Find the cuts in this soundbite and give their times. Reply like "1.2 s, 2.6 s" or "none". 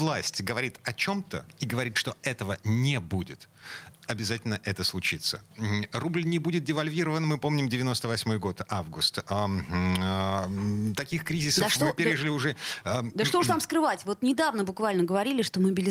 none